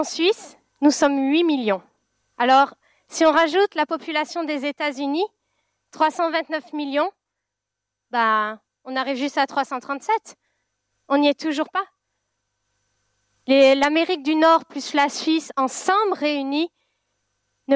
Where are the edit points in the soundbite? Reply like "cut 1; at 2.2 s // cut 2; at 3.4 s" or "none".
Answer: cut 1; at 2.3 s